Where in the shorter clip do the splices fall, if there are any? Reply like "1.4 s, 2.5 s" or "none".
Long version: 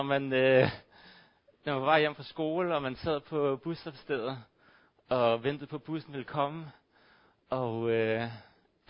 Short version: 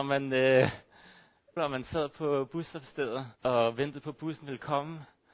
1.6 s, 3.3 s

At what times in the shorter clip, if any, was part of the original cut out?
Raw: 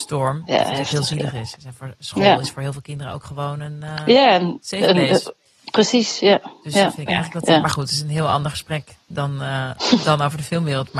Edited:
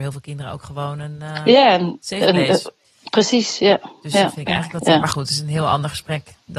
none

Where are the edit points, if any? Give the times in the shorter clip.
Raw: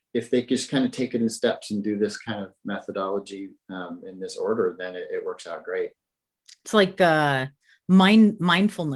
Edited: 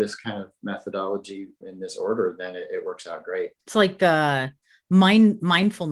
1.6 s, 3.6 s

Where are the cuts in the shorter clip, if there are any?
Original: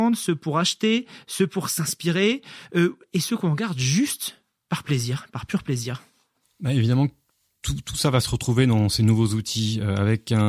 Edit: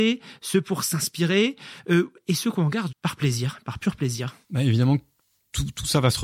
2.9 s, 4.4 s

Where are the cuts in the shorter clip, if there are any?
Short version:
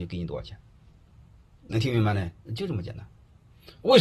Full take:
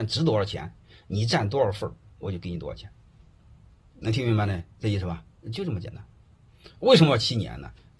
2.4 s

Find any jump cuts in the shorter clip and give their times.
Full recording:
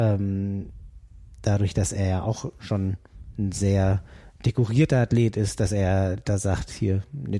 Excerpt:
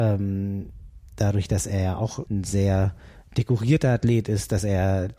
1.1 s, 2.3 s

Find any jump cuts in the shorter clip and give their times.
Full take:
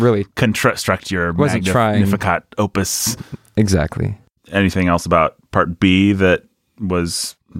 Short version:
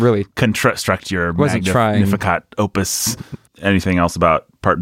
3.5 s

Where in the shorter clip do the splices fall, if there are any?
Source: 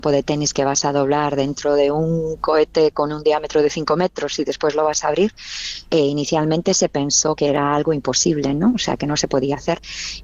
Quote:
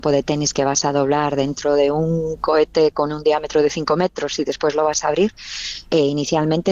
none

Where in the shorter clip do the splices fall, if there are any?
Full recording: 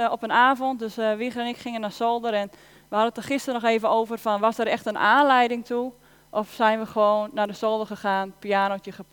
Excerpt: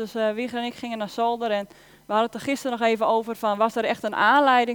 none

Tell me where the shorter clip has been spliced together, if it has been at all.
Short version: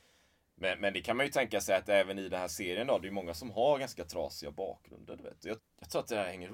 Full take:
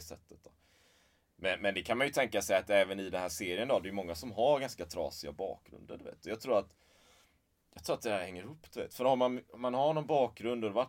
5.6 s

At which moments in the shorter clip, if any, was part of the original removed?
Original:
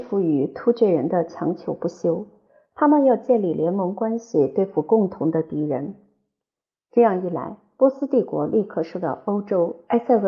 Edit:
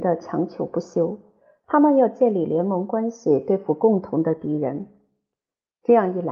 none

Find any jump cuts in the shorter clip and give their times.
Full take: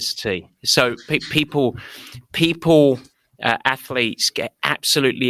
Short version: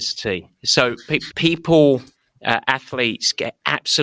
1.3 s

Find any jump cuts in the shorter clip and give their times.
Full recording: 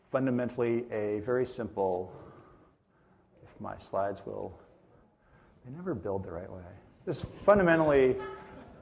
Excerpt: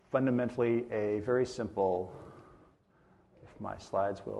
none

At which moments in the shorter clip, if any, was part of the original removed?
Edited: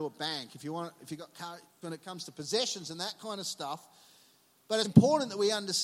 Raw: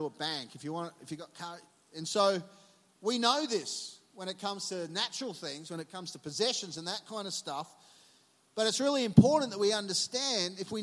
1.8 s, 4.8 s

